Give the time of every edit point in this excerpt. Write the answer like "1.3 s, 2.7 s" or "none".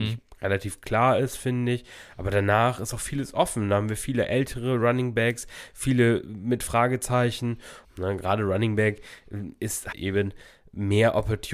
7.8 s, 9.9 s